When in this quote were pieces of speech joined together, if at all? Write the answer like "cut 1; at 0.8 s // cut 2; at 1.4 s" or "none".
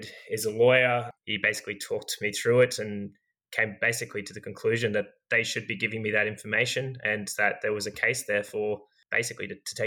none